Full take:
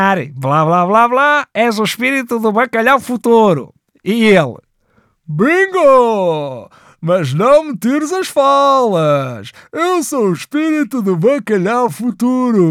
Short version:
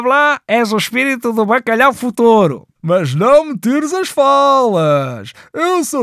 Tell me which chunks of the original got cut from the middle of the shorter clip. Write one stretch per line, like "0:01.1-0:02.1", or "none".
0:03.8-0:06.9